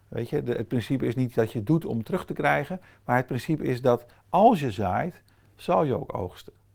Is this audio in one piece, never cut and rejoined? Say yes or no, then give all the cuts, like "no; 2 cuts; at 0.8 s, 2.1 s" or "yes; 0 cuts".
yes; 0 cuts